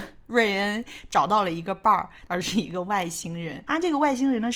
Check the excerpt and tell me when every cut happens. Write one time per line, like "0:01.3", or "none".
0:02.3